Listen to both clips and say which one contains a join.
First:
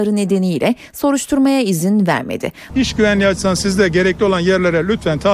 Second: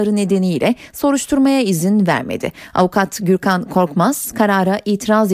first; 1 cut; at 2.7 s

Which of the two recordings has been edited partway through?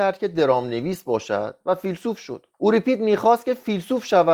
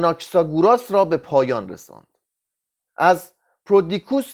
first; 1 cut; at 2.5 s

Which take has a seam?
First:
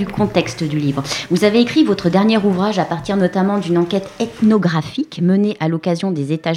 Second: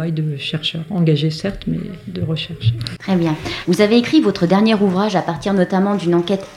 second; 1 cut; at 3.6 s

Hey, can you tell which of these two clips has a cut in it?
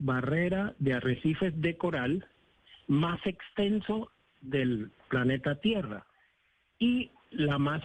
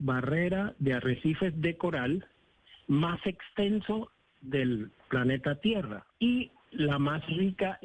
second; 1 cut; at 6.1 s

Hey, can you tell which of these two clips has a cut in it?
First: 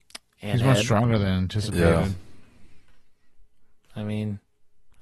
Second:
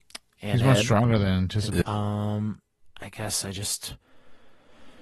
second; 1 cut; at 1.8 s

